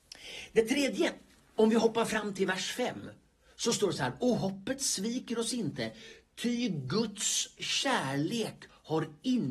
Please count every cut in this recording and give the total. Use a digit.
0